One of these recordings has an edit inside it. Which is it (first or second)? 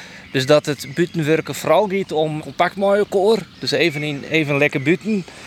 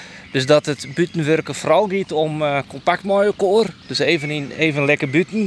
first